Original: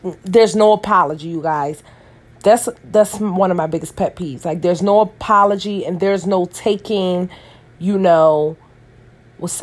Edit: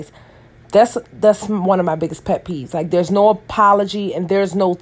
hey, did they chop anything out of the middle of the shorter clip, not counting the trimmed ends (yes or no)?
no